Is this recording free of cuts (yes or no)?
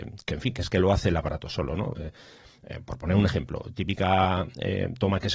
yes